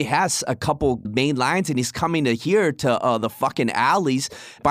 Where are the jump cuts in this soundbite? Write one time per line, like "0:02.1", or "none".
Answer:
0:01.0